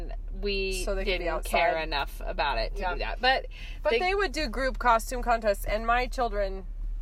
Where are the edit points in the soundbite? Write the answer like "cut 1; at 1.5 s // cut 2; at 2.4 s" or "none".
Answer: none